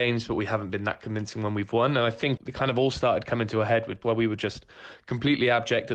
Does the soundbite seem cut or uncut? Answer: cut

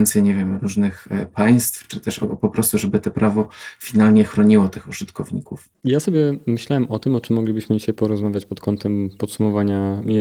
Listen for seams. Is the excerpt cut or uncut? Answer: uncut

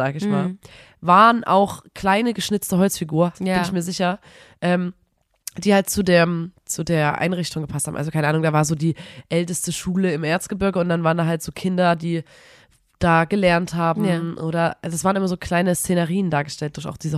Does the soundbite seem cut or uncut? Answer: cut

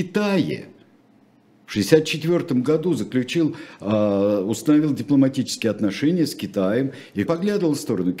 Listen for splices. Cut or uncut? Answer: cut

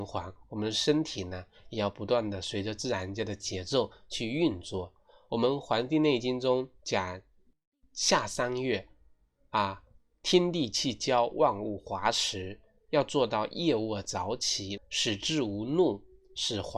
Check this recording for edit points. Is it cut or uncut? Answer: cut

